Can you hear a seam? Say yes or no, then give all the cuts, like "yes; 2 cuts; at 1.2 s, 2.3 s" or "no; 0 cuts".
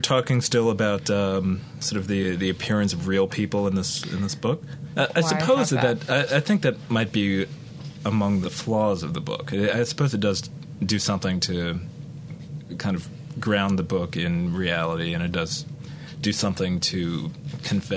yes; 2 cuts; at 4.9 s, 8.4 s